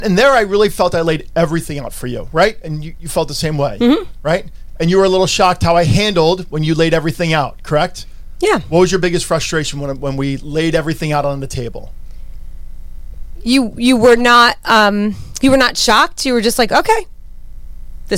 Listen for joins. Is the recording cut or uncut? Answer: uncut